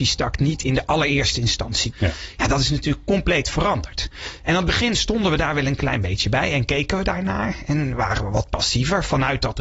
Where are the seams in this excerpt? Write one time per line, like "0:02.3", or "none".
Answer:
0:01.9